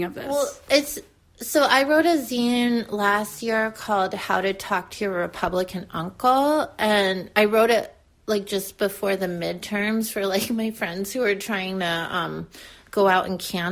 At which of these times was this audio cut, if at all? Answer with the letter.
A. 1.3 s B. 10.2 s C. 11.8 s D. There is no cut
D